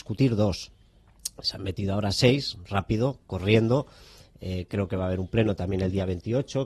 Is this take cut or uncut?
uncut